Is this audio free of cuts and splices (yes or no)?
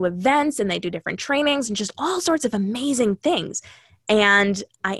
yes